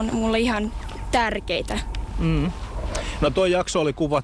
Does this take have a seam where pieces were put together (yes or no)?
no